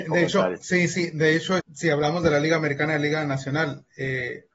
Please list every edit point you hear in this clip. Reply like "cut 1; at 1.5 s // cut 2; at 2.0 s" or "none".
cut 1; at 1.6 s

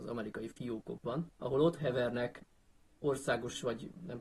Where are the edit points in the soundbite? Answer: cut 1; at 1.3 s

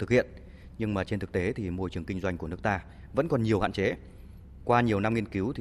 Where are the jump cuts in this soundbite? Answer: none

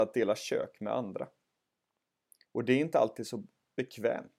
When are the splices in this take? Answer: cut 1; at 2.5 s

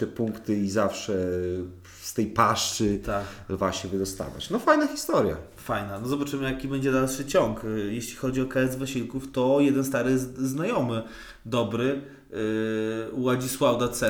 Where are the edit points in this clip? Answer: none

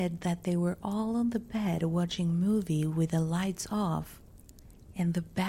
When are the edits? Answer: none

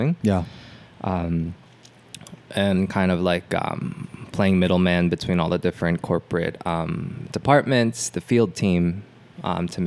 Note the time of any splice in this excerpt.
none

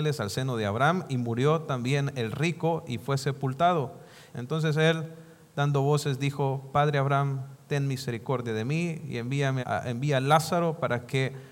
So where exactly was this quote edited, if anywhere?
cut 1; at 4.3 s // cut 2; at 9.6 s

